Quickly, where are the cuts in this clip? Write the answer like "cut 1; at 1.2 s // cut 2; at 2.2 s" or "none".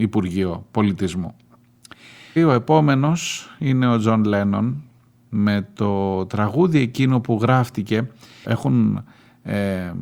cut 1; at 2.4 s // cut 2; at 8.4 s